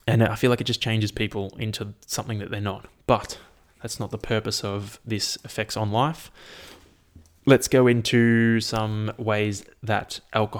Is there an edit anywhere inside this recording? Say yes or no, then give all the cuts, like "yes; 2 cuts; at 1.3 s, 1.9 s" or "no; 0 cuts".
no; 0 cuts